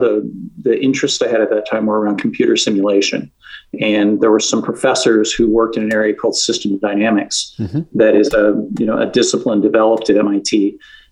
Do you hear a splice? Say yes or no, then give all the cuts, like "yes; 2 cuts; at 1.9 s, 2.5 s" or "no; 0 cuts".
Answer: no; 0 cuts